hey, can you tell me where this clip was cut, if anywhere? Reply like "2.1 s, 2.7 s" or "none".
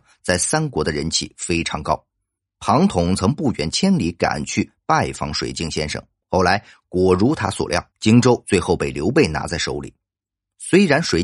6.2 s, 7.9 s

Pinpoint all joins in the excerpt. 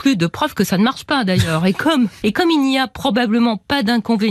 2.2 s

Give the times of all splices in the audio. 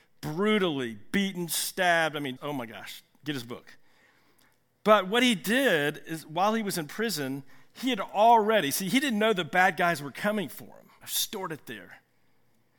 2.4 s, 11.0 s

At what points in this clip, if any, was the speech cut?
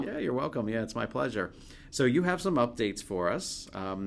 none

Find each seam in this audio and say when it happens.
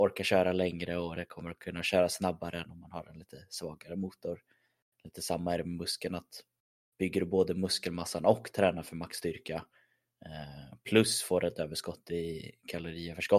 none

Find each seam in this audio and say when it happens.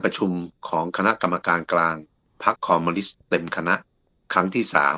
2.6 s

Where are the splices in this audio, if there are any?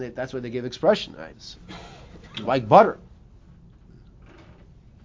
1.3 s

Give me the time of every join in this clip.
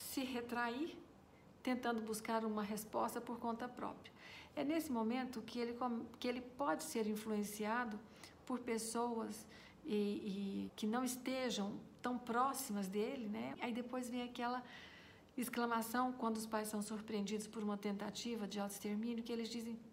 10.7 s, 13.5 s

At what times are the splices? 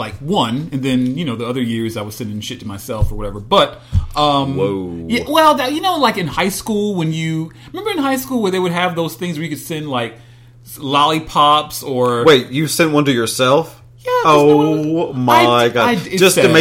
none

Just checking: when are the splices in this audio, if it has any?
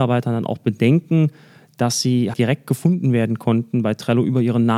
2.3 s

